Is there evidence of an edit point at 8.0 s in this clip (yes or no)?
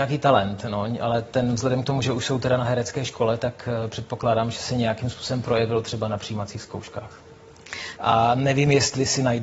yes